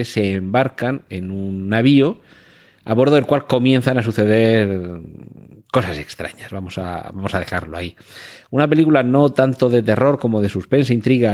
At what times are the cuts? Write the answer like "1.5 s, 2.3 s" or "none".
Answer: none